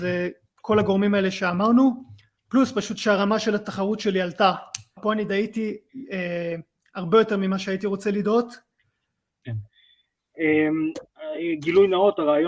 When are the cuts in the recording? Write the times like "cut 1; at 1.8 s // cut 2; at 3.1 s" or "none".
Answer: cut 1; at 5.0 s // cut 2; at 9.4 s